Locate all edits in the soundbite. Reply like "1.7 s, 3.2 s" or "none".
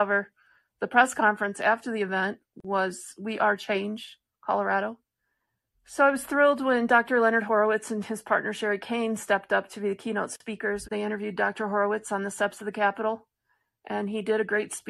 5.7 s, 10.8 s